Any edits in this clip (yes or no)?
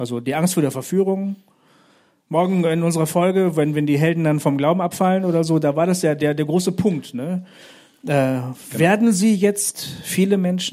no